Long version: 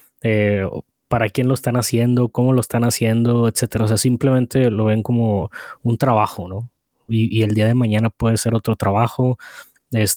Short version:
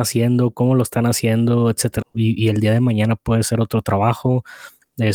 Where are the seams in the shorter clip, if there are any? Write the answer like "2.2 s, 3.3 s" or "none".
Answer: 2.0 s